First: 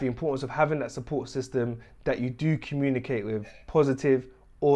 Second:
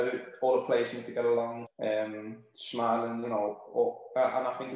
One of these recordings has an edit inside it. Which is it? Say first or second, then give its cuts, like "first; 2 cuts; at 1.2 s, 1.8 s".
second; 1 cut; at 1.7 s